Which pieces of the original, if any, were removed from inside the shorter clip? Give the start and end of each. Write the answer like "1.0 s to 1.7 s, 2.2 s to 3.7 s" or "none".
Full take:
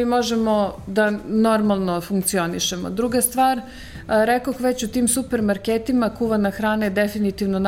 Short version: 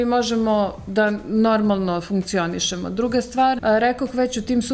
3.6 s to 4.0 s

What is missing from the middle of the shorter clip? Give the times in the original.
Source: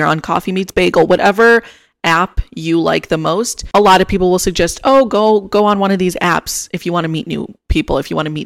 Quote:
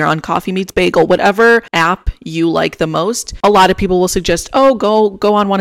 1.7 s to 2.0 s

